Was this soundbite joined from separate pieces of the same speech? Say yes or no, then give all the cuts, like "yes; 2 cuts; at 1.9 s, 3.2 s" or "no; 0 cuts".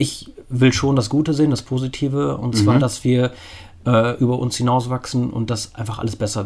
no; 0 cuts